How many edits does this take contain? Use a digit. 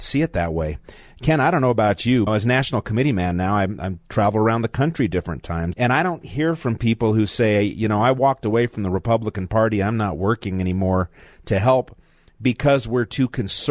2